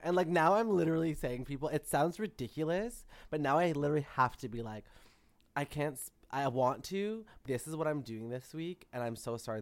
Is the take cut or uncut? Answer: cut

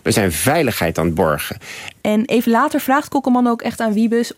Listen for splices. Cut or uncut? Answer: cut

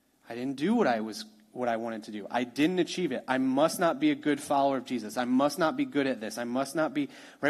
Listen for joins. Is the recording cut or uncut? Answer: uncut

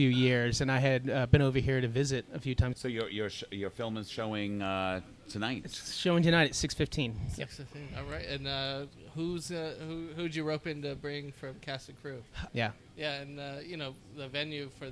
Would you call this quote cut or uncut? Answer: cut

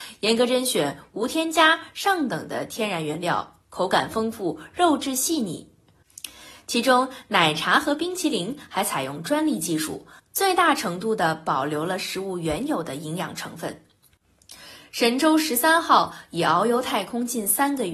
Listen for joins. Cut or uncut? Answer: uncut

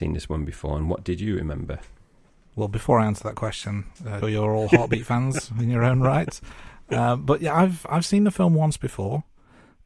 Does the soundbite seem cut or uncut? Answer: cut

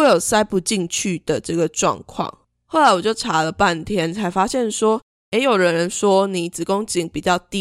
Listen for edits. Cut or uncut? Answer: uncut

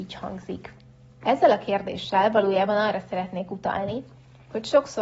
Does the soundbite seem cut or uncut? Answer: cut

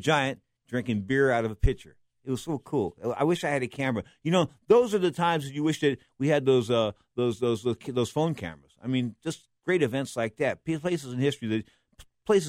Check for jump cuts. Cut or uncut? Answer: uncut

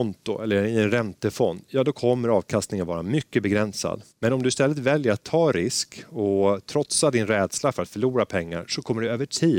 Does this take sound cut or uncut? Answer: cut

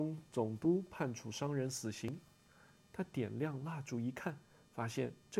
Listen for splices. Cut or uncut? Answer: cut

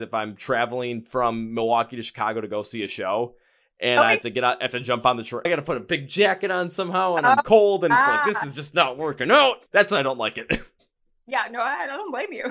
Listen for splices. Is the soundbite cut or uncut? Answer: cut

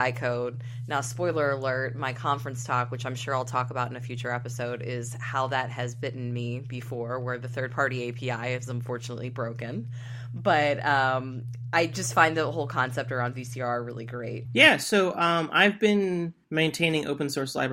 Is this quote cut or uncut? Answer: cut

